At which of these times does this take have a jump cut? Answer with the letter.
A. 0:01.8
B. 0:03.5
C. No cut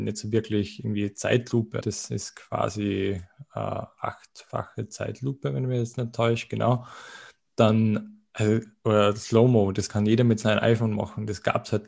A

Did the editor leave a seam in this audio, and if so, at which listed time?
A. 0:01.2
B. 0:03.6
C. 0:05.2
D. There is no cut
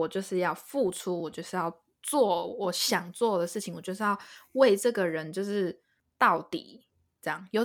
D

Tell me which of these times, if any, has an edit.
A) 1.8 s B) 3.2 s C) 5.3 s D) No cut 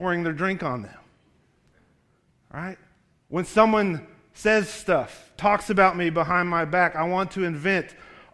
D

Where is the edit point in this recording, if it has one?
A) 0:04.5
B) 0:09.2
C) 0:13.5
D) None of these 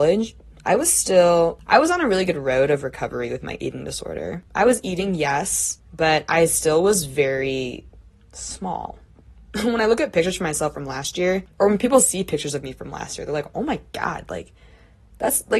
A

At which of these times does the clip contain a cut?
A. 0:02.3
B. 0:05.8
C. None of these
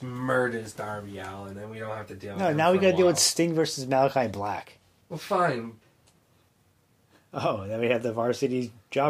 B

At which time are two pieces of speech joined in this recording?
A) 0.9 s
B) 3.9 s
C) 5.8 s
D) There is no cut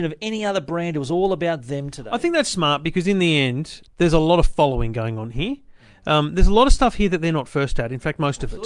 B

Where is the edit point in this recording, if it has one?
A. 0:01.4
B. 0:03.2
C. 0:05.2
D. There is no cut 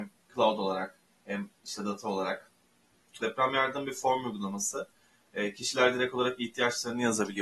B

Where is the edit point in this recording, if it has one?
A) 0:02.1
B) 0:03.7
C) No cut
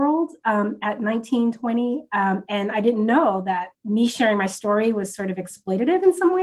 B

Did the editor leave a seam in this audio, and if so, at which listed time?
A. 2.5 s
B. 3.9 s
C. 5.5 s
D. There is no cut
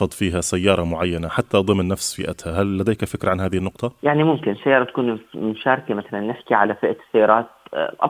D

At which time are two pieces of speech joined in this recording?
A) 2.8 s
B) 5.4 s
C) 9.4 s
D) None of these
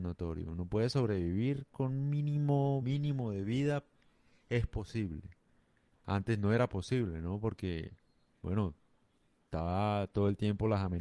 A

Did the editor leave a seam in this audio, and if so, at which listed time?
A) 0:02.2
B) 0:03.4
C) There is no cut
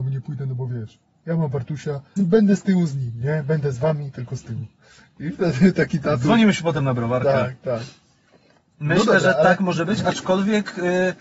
A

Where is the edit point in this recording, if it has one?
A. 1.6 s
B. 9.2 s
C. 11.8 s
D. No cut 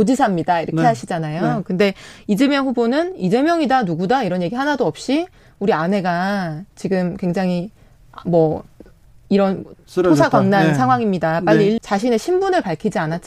C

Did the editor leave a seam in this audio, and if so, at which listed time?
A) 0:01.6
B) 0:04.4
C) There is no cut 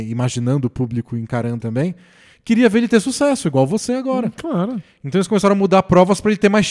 A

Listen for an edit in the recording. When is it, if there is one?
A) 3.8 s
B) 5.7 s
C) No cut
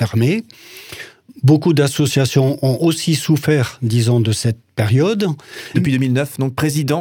B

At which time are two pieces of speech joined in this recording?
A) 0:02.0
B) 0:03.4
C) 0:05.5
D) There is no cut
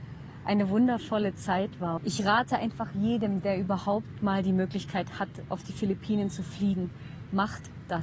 A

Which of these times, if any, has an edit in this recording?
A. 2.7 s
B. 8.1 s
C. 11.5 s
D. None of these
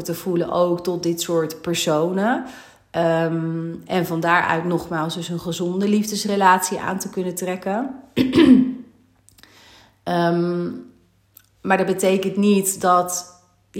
D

